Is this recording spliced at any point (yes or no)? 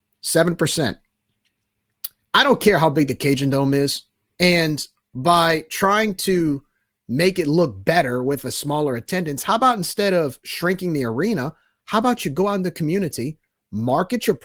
yes